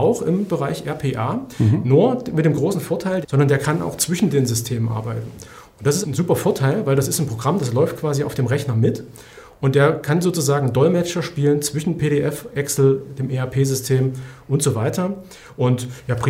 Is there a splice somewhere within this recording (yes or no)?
yes